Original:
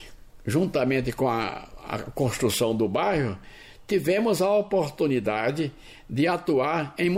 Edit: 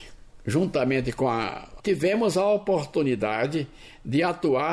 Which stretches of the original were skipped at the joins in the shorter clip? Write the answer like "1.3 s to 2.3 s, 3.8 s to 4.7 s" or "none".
1.8 s to 3.8 s